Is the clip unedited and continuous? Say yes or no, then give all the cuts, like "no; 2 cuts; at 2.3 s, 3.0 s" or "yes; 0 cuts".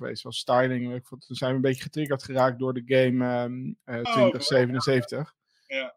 no; 1 cut; at 4.1 s